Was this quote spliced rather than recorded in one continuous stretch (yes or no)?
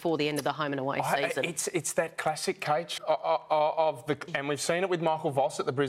yes